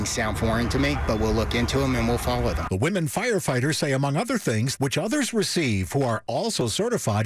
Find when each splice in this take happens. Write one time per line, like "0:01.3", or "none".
0:04.8